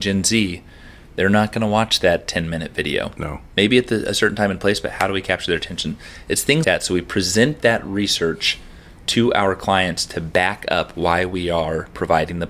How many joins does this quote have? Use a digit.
1